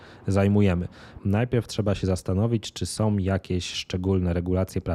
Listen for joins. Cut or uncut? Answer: cut